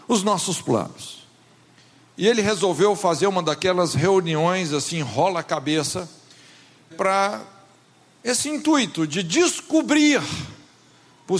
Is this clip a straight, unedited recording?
no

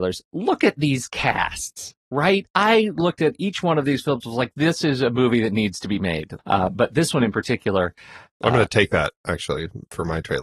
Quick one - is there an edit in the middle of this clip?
yes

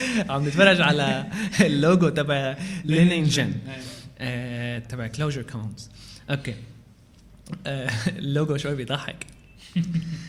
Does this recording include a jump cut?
yes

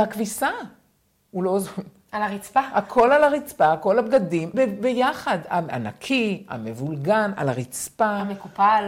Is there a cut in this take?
yes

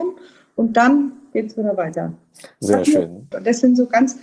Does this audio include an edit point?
yes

